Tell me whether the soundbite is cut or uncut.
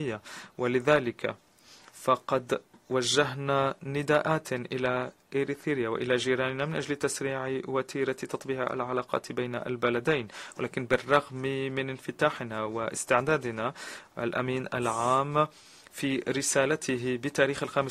uncut